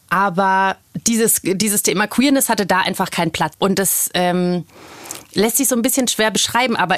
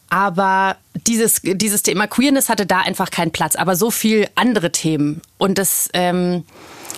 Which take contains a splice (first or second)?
first